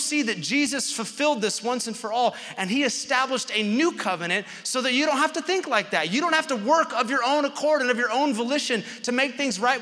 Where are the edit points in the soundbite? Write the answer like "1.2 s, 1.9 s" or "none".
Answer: none